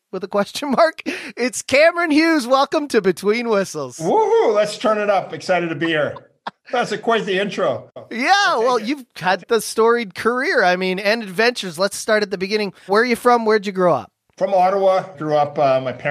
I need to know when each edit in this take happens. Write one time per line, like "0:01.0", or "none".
0:09.4
0:12.9
0:15.1